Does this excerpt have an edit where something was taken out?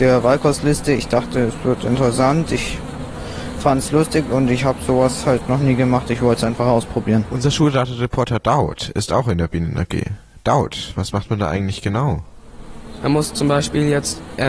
no; 0 cuts

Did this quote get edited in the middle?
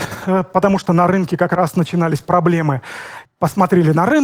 yes; 1 cut; at 3.3 s

